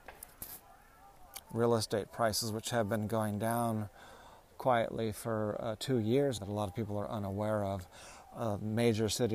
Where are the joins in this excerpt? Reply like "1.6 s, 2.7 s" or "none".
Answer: 1.4 s, 6.4 s